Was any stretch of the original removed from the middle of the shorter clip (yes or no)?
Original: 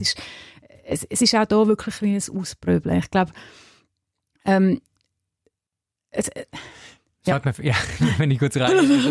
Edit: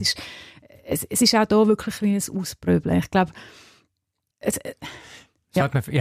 yes